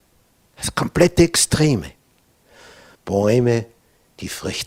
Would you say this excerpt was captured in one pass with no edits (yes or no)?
no